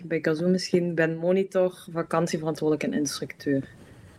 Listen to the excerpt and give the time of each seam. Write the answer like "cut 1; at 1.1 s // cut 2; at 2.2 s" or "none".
none